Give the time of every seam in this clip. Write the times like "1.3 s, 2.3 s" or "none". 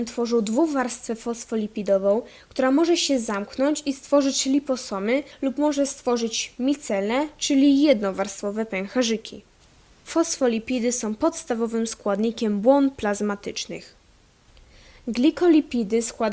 5.3 s